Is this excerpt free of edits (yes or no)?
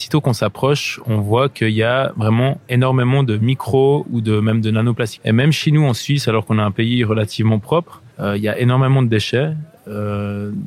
no